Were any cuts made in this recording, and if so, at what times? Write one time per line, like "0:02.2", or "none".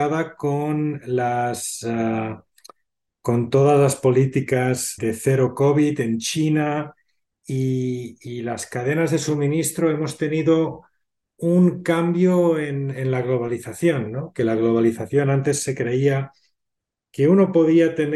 0:05.0